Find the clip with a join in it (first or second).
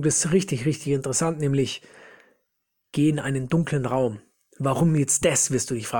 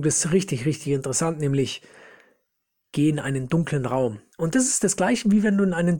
second